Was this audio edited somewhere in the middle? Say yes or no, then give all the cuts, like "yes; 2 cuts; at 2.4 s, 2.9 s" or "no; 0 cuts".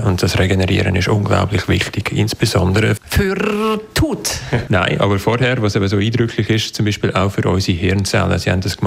yes; 2 cuts; at 3.0 s, 4.7 s